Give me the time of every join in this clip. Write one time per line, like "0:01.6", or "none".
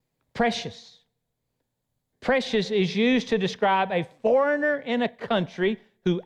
0:02.1